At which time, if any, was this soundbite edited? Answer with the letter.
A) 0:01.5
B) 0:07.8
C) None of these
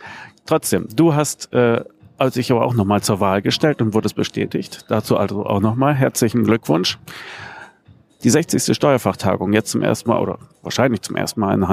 C